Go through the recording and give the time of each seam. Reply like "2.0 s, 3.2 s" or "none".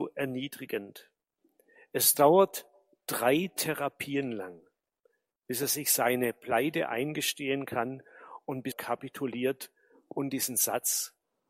8.7 s